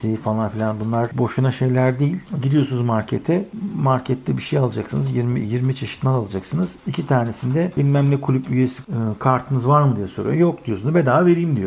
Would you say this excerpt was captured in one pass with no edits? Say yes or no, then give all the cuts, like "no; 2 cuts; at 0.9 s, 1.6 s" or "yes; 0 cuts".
yes; 0 cuts